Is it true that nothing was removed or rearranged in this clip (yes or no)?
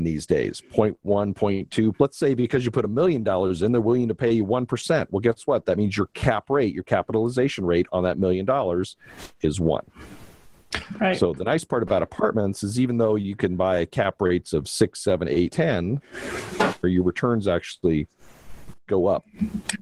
no